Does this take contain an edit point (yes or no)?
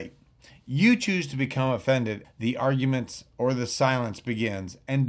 yes